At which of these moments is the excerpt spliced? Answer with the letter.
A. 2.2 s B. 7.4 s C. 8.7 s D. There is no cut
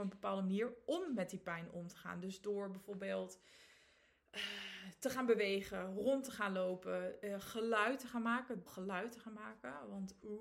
C